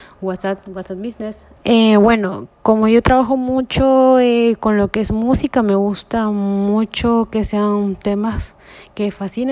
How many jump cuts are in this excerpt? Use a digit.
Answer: 1